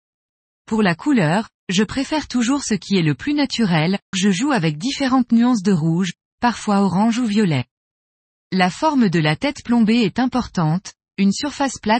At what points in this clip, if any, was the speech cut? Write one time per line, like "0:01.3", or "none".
0:04.1
0:08.4